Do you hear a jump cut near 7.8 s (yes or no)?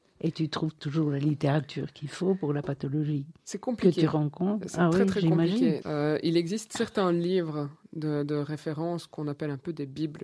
no